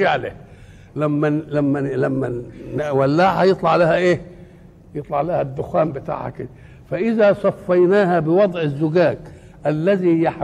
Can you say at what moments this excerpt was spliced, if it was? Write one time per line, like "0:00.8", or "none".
none